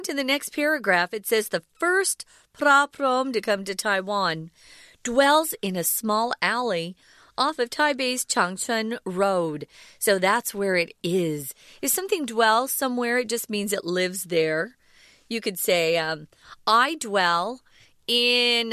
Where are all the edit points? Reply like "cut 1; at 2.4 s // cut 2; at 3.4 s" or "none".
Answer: none